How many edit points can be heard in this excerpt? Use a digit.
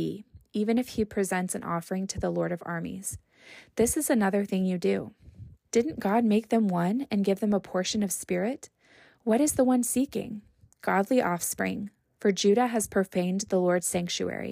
2